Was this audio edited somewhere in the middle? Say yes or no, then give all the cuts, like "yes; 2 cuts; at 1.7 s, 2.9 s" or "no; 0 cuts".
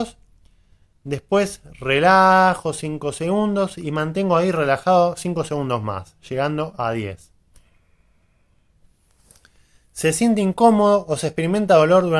no; 0 cuts